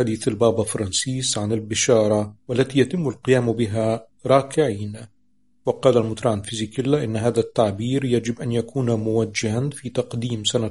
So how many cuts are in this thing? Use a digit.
1